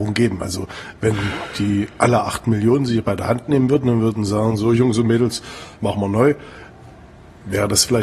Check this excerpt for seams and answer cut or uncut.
cut